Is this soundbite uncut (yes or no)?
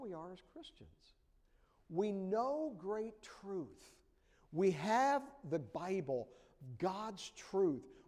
yes